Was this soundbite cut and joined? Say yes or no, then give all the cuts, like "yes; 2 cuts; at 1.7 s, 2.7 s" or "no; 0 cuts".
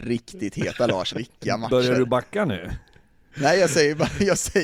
yes; 1 cut; at 1.1 s